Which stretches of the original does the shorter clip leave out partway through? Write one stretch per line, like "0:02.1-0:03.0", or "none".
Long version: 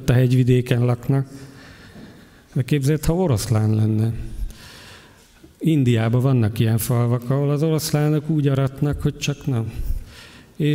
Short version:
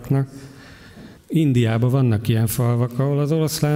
0:02.1-0:05.5